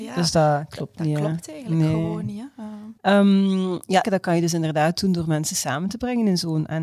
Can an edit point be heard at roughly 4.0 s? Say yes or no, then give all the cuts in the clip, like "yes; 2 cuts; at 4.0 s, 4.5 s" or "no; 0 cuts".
yes; 2 cuts; at 3.0 s, 4.0 s